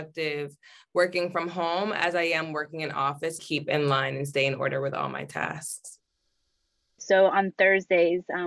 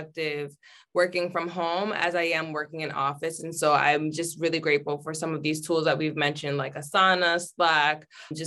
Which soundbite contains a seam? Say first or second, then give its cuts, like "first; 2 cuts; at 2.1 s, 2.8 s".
first; 1 cut; at 3.4 s